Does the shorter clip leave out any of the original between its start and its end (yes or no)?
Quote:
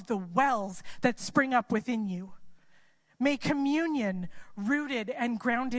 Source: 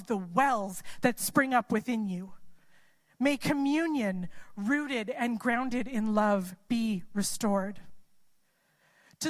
no